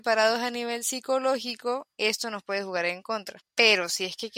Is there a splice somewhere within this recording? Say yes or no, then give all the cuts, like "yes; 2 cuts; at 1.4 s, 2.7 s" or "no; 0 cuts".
yes; 1 cut; at 3.4 s